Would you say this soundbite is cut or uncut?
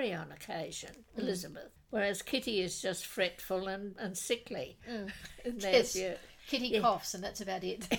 cut